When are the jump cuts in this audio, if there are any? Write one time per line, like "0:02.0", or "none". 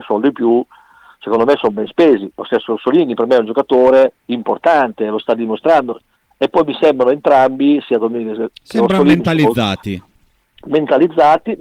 none